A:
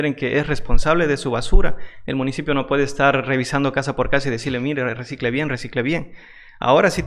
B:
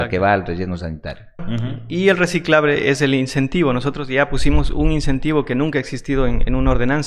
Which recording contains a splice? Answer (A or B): B